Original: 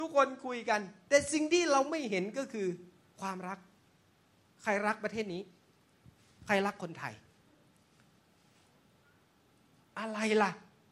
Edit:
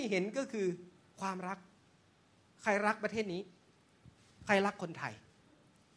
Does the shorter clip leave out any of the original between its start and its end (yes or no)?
no